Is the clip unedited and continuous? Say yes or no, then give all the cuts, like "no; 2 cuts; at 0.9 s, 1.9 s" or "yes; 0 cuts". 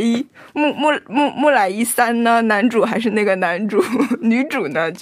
yes; 0 cuts